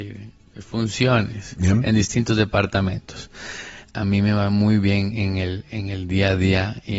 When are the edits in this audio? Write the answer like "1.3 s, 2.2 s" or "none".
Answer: 3.8 s